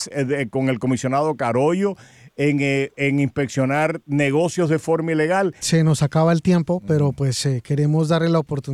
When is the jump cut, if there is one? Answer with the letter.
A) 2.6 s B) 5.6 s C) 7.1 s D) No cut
B